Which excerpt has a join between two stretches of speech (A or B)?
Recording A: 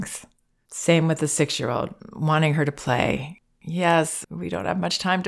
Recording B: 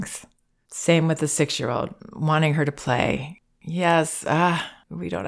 A